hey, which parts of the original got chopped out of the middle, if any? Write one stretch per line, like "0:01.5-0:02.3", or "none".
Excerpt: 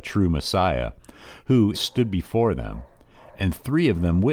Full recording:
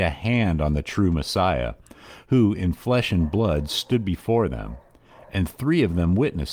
0:02.6-0:03.7

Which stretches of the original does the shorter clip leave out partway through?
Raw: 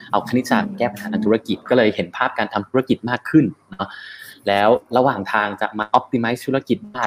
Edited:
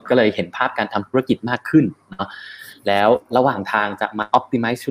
none

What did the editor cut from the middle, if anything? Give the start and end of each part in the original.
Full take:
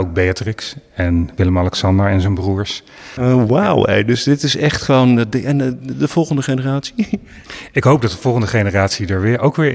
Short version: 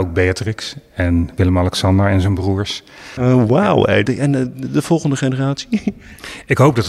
0:04.0-0:05.3

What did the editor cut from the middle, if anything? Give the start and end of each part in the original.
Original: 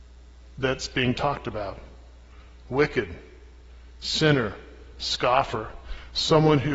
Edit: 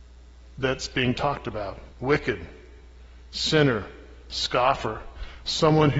0:01.9-0:02.6

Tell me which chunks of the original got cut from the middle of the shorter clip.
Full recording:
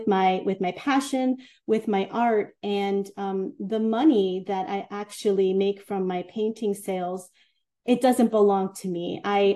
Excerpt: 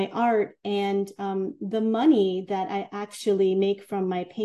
none

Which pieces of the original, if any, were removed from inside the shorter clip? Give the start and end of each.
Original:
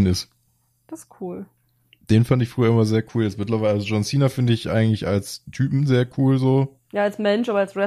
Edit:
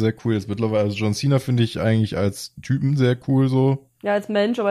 none

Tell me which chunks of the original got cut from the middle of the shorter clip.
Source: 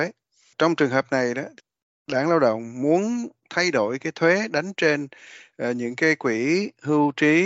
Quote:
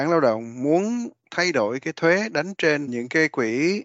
0:05.1-0:05.7

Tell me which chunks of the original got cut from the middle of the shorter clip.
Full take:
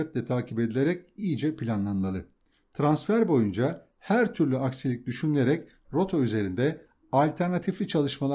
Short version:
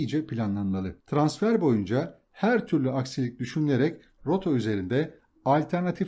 0:02.3-0:02.7

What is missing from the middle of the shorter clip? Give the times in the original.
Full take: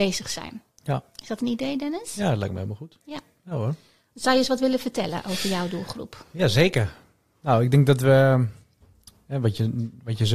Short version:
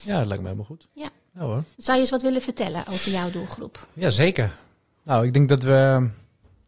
0:03.8-0:04.1

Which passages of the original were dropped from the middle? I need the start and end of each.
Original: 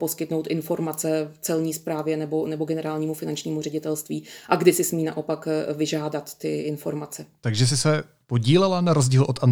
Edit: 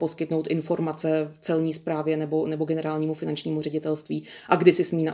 none

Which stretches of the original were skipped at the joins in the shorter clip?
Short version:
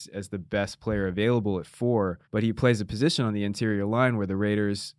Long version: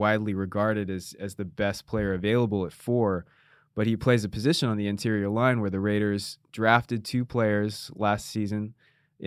0:03.3-0:03.7

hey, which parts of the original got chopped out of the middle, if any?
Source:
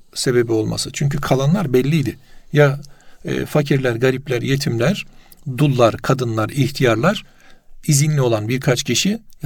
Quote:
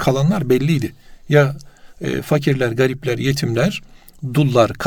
none

